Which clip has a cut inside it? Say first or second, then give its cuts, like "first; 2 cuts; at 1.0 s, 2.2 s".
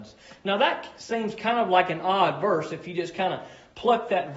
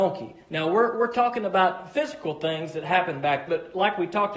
second; 2 cuts; at 0.9 s, 3.5 s